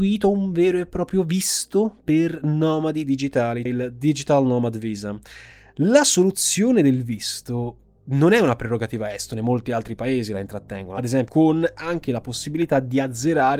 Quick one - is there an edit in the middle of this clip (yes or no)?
yes